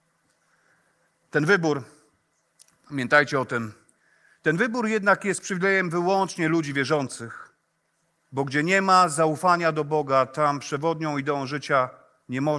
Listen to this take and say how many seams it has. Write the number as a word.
zero